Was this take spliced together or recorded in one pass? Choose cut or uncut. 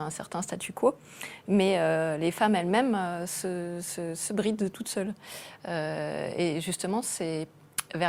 uncut